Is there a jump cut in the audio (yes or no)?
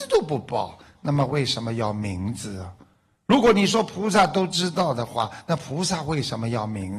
no